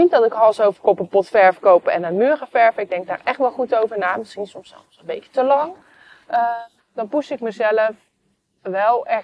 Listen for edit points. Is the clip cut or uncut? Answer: cut